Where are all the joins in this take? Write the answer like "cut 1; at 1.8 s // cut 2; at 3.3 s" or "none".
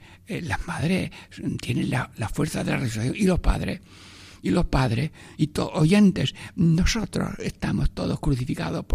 cut 1; at 5.4 s